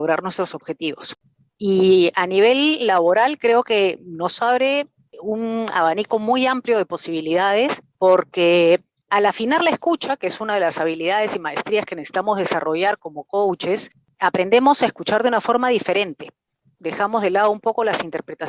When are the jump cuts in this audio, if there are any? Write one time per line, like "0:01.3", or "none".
none